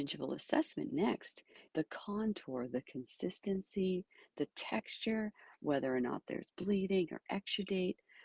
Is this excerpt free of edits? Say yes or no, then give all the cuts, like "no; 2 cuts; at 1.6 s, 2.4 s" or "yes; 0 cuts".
no; 1 cut; at 1.7 s